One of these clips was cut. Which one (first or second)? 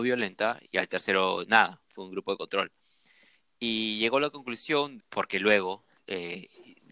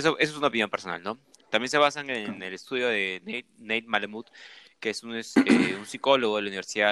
first